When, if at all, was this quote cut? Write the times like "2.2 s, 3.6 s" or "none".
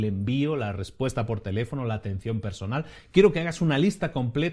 none